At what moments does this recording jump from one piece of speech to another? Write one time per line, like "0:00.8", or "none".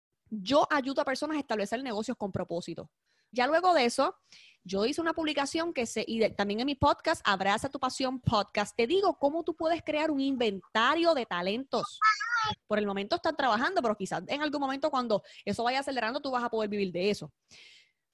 0:03.3
0:12.5